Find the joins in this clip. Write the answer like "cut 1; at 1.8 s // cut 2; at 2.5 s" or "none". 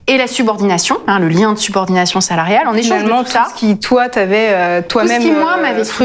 none